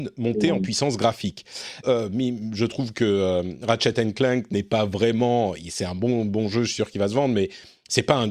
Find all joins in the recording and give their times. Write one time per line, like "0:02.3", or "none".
0:01.8